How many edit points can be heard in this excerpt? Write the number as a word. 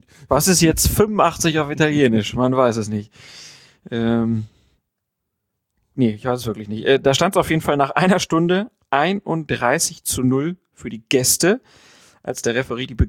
zero